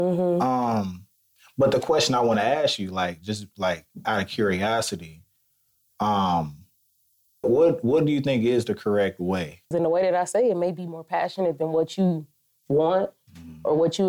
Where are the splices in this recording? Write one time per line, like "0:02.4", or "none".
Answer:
0:07.4
0:09.7